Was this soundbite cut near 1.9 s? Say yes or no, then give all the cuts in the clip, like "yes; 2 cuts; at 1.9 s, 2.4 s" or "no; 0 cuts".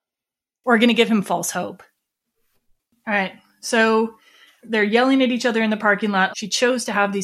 no; 1 cut; at 6.3 s